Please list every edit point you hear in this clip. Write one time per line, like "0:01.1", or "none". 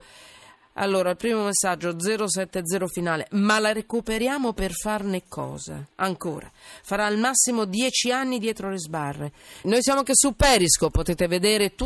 0:05.9
0:09.6